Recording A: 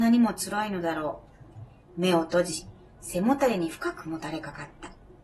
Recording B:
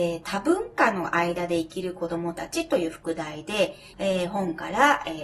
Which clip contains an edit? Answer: B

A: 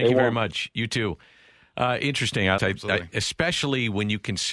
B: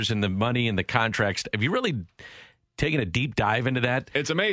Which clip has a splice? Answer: A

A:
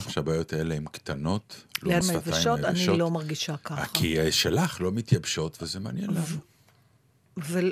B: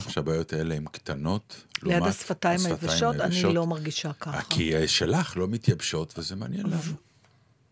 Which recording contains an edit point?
A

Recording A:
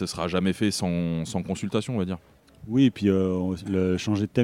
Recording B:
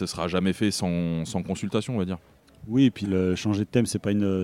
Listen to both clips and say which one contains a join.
B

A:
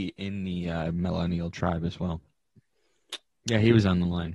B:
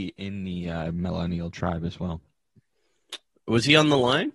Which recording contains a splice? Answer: A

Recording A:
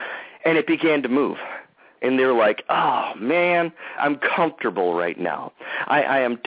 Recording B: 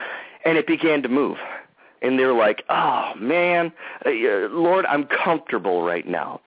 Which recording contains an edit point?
A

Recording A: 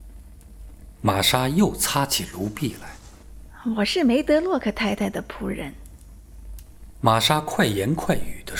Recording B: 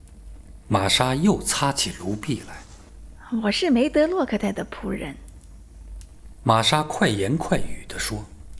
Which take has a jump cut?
B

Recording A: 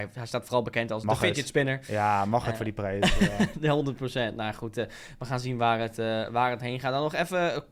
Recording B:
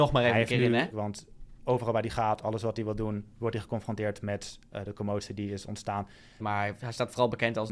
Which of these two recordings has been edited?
B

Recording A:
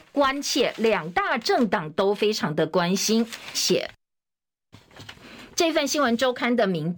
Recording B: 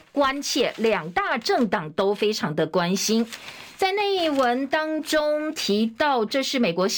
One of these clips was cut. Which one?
A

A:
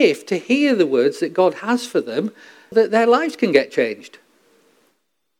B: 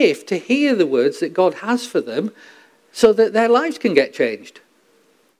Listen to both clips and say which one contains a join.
A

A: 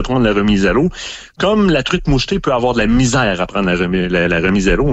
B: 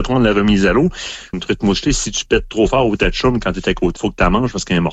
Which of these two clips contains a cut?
B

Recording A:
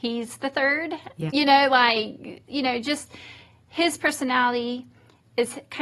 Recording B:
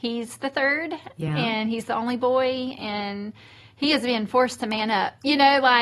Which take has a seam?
A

